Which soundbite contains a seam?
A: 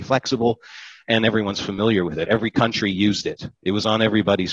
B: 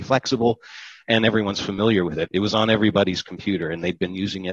B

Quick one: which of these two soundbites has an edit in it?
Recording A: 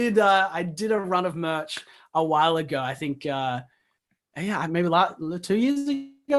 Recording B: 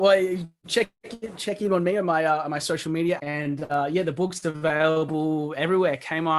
B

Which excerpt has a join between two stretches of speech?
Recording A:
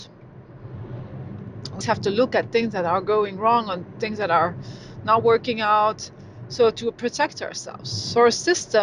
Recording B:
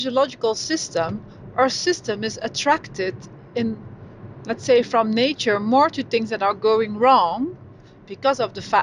A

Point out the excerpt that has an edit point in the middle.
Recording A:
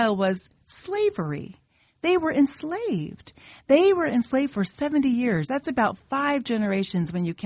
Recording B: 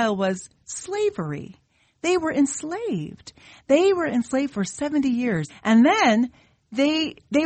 B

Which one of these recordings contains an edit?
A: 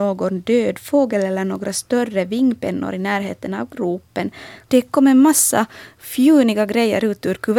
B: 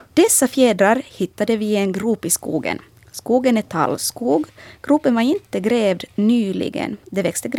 A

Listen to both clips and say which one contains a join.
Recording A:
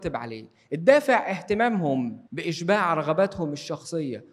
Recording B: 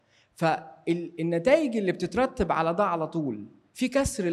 A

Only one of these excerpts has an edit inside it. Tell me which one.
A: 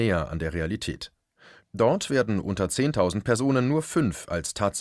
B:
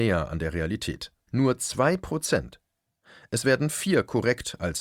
B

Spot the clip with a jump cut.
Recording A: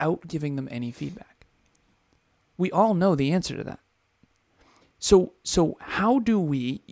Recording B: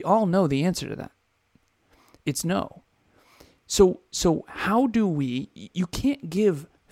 A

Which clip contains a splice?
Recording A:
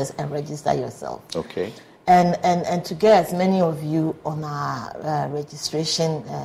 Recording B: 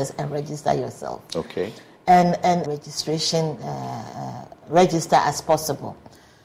B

